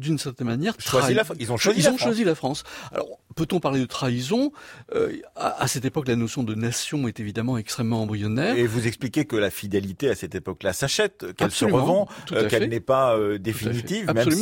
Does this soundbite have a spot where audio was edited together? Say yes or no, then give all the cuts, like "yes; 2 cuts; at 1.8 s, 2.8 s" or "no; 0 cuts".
no; 0 cuts